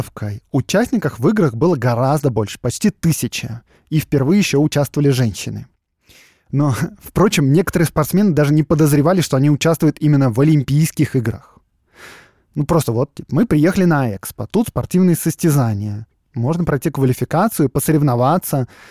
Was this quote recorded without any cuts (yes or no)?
yes